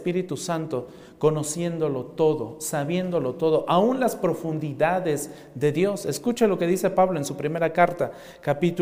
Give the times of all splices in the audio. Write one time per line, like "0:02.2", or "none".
none